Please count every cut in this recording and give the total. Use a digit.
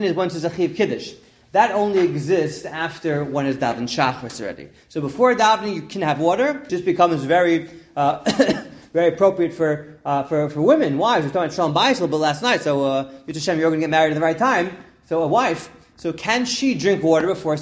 1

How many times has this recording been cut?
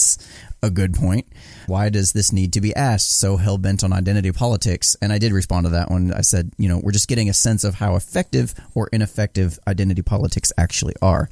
1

